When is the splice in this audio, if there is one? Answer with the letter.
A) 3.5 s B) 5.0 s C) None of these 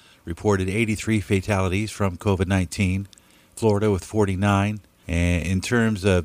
B